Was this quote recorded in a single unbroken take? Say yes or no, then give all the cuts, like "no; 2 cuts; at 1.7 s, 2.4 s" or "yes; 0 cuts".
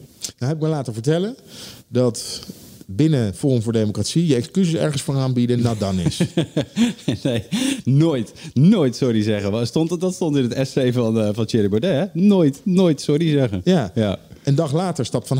yes; 0 cuts